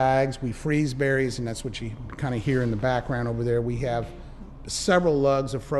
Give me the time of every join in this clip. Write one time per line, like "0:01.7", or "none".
none